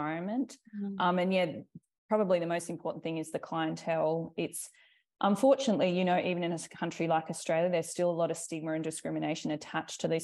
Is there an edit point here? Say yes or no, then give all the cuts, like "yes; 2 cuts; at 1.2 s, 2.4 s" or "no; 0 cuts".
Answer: no; 0 cuts